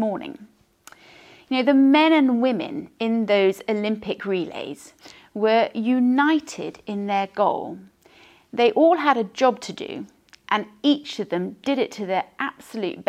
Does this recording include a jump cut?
no; 0 cuts

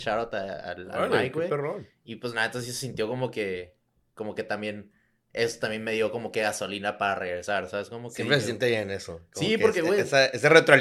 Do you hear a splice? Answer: no; 0 cuts

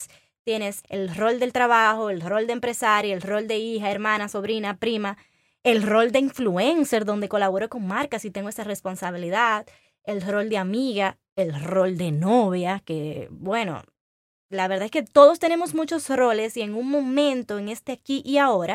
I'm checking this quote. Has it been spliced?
no; 0 cuts

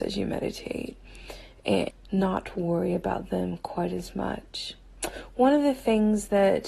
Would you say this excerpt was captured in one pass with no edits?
no; 1 cut; at 1.9 s

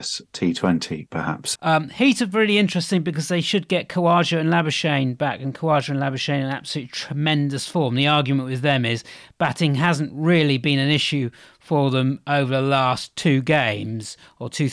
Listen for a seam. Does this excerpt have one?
yes; 1 cut; at 1.6 s

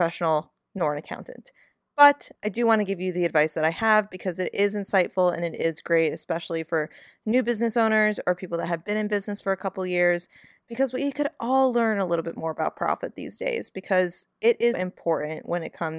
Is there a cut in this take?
yes; 1 cut; at 14.7 s

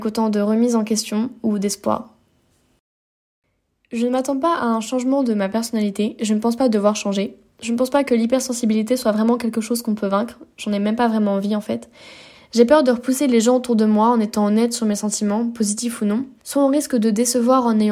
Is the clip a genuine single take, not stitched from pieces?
no; 2 cuts; at 12.3 s, 16.4 s

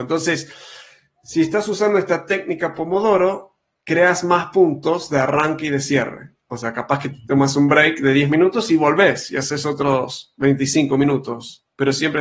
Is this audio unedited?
yes; 0 cuts

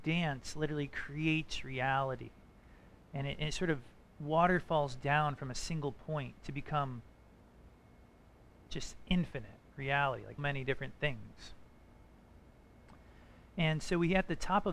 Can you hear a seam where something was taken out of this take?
yes; 1 cut; at 10.4 s

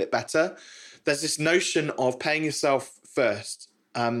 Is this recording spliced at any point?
no; 0 cuts

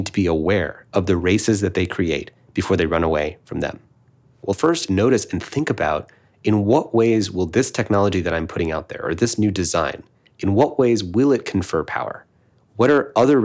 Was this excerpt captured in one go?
no; 1 cut; at 4.3 s

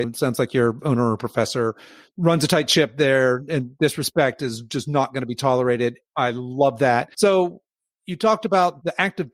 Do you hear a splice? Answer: yes; 1 cut; at 7.1 s

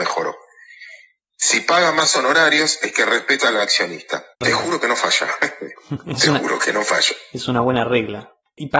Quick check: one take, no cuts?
no; 2 cuts; at 1.2 s, 4.3 s

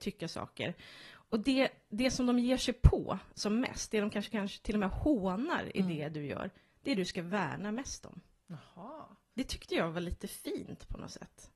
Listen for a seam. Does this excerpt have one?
no; 0 cuts

